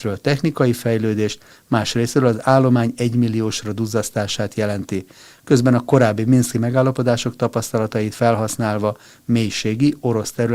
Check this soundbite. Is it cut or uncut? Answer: uncut